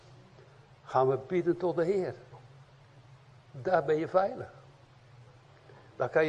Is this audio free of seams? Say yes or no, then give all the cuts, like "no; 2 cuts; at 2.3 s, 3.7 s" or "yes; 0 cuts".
yes; 0 cuts